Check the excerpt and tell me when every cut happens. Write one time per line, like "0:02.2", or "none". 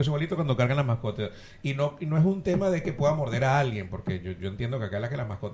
none